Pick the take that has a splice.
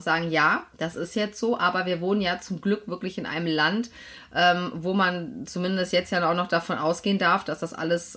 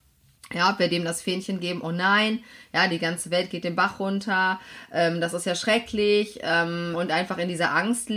second; 1 cut; at 6.9 s

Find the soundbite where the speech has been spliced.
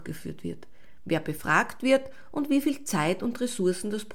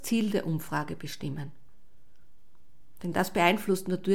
first; 1 cut; at 1.0 s

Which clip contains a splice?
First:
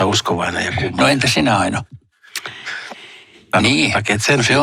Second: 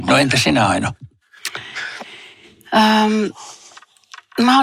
first; 1 cut; at 3.5 s

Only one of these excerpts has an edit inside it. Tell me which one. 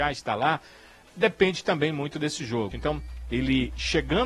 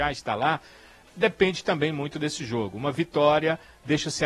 first; 1 cut; at 2.7 s

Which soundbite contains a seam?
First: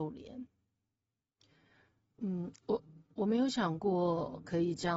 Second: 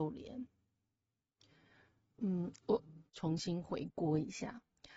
second; 1 cut; at 3.1 s

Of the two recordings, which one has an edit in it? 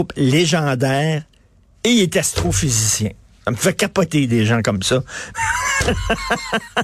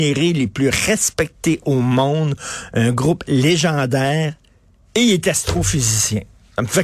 first; 1 cut; at 5.3 s

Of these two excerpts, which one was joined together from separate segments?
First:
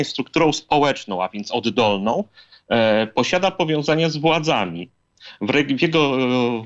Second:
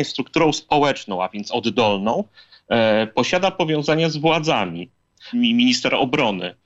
second; 1 cut; at 5.3 s

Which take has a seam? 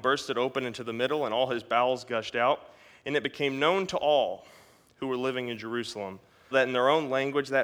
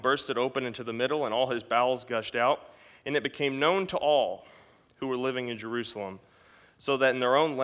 first; 1 cut; at 6.5 s

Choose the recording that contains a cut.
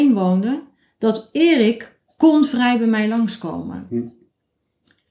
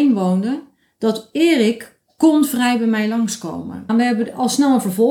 second; 1 cut; at 3.9 s

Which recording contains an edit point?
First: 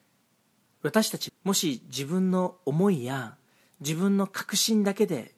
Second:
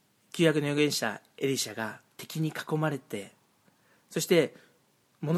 first; 1 cut; at 1.3 s

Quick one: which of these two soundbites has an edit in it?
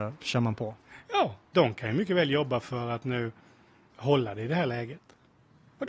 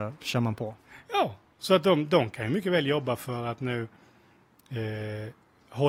first; 2 cuts; at 1.5 s, 3.9 s

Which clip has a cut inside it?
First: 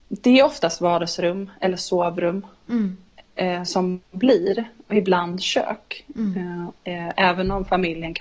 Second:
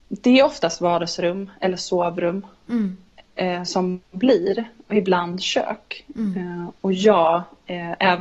first; 1 cut; at 6.8 s

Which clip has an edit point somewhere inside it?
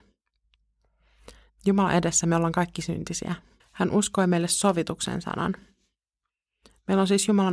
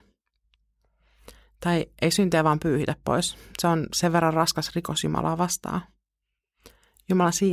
first; 2 cuts; at 1.5 s, 3.6 s

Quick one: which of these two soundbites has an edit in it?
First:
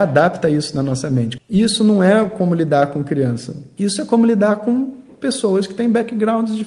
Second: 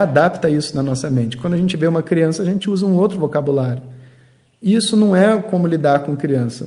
first; 2 cuts; at 1.4 s, 3.8 s

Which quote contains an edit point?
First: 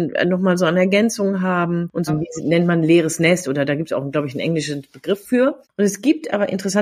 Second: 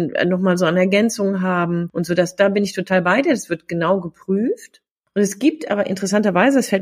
first; 2 cuts; at 2.1 s, 5.6 s

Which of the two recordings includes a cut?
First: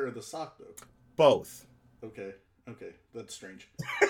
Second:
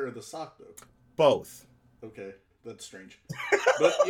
second; 1 cut; at 2.5 s

